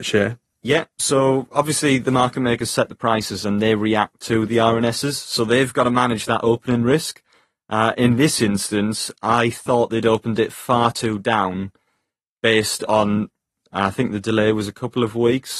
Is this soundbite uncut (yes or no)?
yes